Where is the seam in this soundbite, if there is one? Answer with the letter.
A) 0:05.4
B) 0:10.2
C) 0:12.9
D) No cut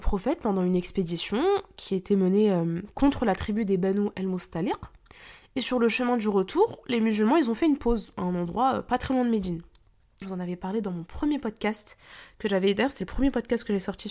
B